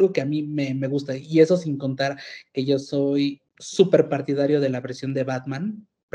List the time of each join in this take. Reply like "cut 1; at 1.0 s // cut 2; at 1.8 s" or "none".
cut 1; at 3.5 s